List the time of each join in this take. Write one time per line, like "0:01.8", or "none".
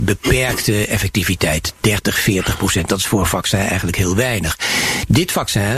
none